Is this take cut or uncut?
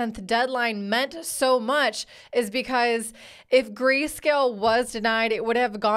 uncut